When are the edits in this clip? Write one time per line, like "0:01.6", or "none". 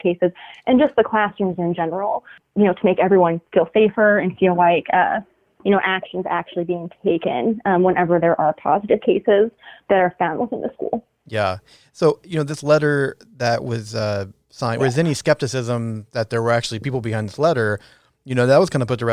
0:14.8